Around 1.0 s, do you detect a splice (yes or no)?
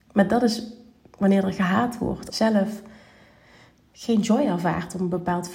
no